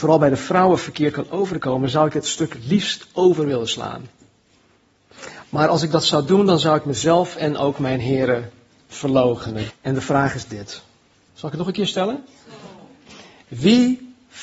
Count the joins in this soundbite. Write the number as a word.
two